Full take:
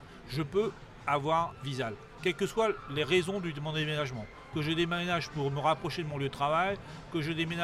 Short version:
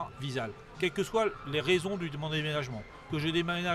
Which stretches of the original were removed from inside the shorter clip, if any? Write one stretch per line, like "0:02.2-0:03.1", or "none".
none